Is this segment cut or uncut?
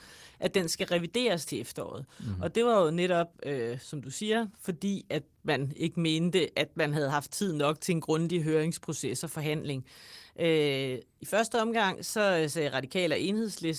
uncut